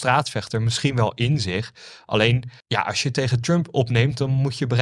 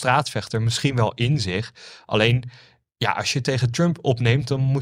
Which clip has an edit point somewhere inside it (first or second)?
first